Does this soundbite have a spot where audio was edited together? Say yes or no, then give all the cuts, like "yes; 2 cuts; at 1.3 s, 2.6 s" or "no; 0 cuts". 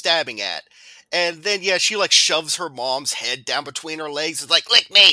no; 0 cuts